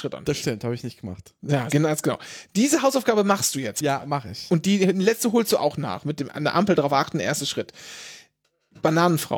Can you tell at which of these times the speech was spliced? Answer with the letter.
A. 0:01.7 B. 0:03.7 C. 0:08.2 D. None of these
A